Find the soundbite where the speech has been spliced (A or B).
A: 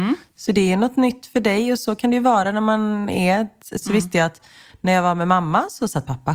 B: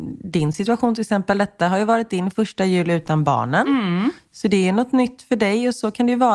A